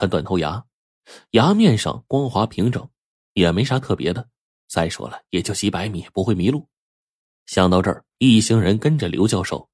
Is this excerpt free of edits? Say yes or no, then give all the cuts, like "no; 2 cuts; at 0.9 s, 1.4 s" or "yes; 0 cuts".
no; 1 cut; at 8.2 s